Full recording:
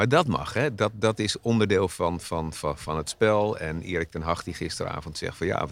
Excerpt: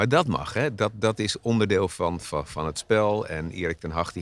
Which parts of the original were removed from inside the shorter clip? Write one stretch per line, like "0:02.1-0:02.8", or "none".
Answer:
0:02.2-0:02.5